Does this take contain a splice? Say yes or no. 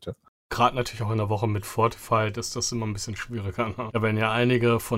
yes